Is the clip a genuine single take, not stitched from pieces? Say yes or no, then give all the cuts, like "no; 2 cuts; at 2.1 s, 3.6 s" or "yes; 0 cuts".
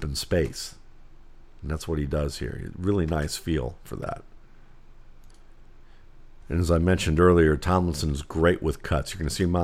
yes; 0 cuts